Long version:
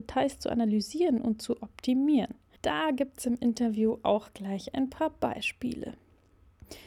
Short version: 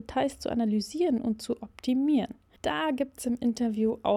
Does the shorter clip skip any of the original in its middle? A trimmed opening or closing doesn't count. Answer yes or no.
no